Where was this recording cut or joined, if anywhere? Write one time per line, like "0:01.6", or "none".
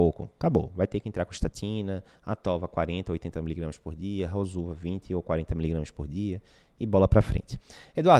none